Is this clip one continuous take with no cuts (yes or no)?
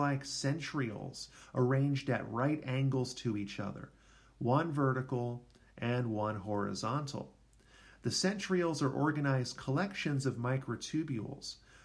yes